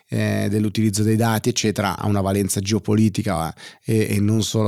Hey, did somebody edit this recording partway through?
yes; 1 cut; at 2.0 s

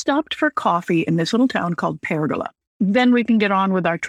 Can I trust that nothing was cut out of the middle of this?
no; 1 cut; at 2.6 s

